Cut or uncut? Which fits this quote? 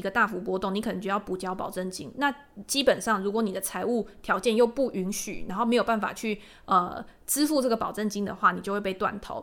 uncut